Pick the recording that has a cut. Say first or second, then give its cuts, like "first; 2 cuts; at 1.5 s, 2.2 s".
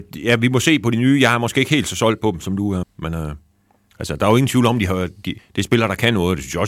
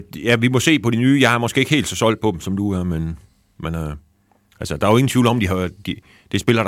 first; 2 cuts; at 2.8 s, 5.4 s